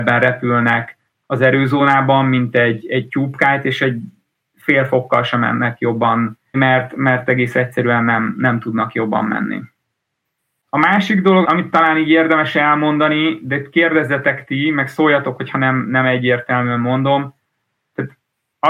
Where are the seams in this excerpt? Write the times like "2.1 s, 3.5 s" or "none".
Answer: 6.5 s, 11.4 s